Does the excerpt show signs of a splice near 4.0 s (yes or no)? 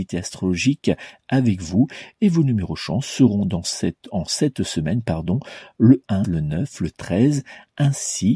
no